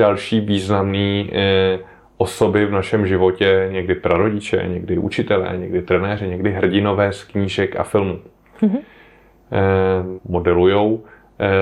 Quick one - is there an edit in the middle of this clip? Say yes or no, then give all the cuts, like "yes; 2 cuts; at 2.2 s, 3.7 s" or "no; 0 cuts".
yes; 1 cut; at 10.2 s